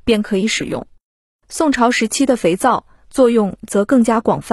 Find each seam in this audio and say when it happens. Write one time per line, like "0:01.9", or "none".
none